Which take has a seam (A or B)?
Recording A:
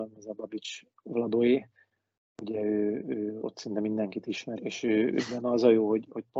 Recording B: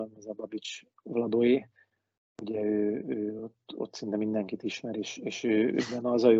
A